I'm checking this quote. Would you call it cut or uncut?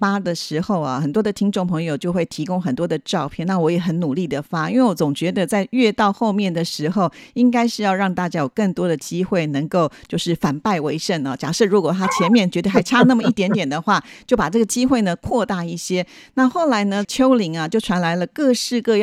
uncut